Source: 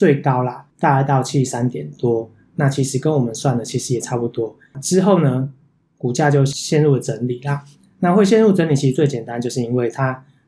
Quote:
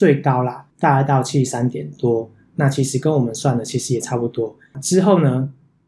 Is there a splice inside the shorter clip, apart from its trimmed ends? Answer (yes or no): no